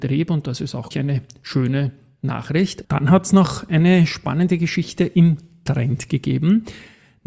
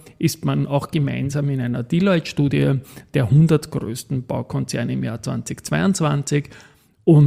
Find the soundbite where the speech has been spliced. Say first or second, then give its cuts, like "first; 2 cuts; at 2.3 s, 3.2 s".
first; 2 cuts; at 0.9 s, 2.8 s